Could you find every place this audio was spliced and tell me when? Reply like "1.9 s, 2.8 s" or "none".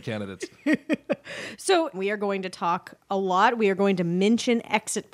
1.9 s